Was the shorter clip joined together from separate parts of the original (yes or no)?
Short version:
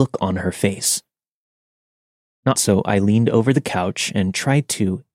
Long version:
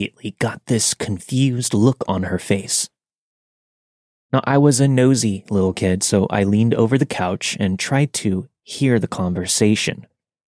yes